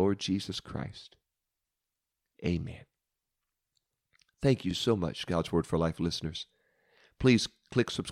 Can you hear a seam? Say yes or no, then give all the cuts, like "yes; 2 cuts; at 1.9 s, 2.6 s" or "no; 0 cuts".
no; 0 cuts